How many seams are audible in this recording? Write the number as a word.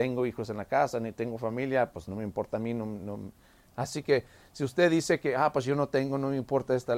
one